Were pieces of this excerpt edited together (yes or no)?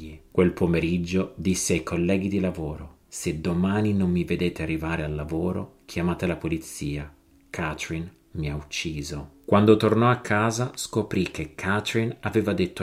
no